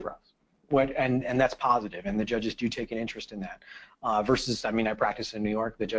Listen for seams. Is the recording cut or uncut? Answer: uncut